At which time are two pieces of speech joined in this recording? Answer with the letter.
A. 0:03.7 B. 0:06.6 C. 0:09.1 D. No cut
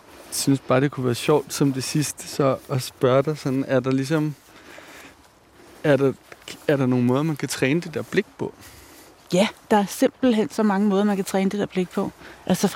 D